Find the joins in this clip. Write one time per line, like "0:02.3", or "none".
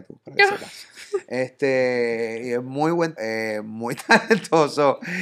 0:03.2